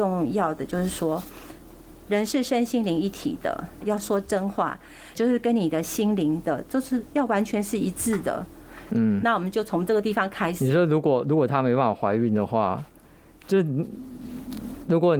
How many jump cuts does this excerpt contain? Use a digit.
3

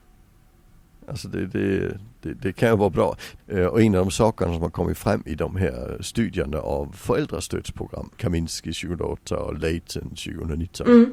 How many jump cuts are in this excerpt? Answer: 2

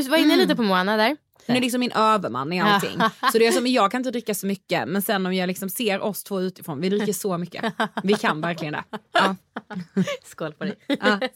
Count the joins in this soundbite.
1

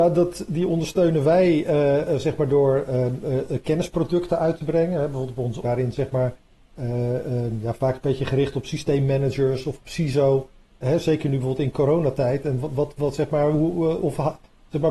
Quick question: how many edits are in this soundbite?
2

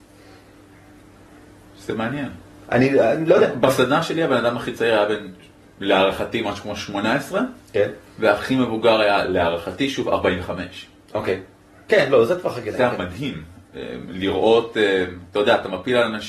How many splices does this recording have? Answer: 0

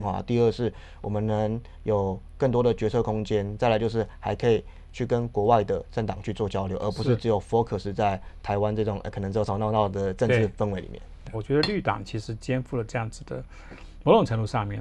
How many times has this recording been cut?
2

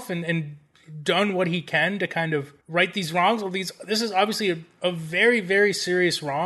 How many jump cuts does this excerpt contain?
1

